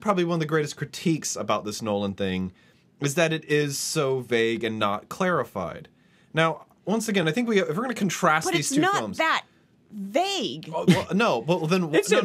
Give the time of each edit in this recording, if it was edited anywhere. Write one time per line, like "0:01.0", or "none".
none